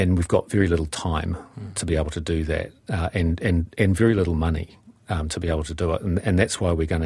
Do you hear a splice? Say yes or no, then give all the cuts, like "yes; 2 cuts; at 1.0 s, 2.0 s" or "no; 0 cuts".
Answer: no; 0 cuts